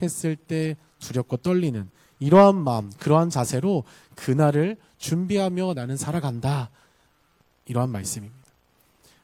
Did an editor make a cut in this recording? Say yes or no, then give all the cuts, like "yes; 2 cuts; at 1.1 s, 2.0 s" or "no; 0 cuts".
no; 0 cuts